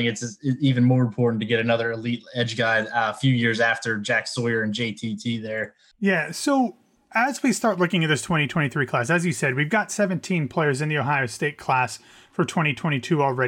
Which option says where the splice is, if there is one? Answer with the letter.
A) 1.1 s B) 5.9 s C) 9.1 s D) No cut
B